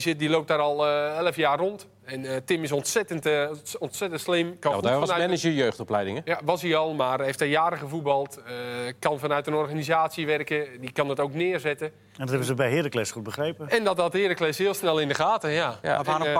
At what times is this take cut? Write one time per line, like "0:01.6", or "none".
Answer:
none